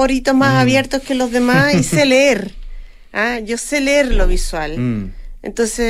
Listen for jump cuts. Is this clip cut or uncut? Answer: uncut